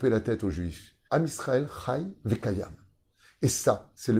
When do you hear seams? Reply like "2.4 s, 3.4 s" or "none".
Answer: 1.1 s

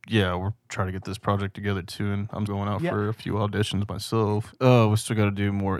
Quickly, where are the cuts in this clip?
2.5 s, 4.5 s

